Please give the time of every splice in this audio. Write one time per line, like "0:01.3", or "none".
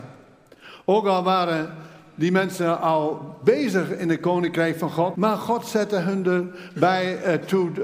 0:05.1